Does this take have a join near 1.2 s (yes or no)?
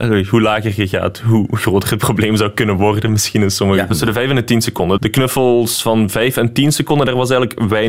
no